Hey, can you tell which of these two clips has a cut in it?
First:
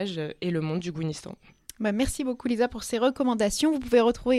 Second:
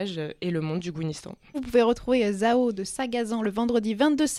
second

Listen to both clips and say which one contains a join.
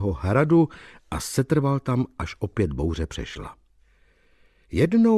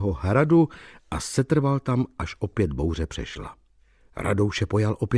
second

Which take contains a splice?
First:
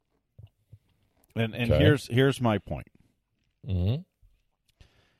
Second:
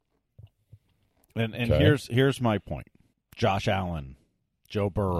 second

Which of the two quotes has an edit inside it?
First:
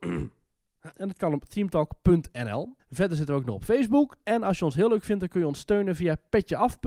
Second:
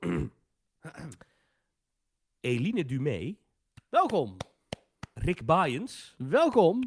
first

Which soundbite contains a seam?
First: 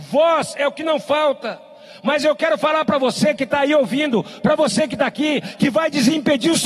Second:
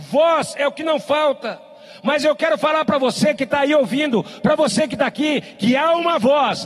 first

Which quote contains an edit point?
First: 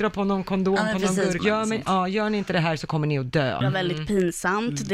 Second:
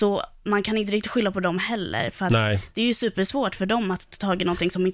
first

